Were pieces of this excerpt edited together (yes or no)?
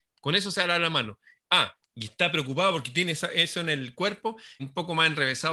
yes